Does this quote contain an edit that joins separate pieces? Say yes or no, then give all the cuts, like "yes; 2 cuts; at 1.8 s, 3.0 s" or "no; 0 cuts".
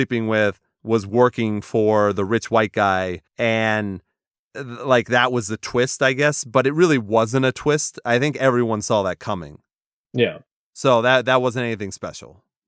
yes; 1 cut; at 3.3 s